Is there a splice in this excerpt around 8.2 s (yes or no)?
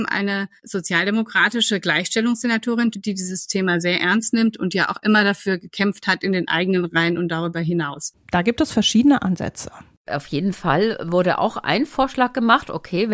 yes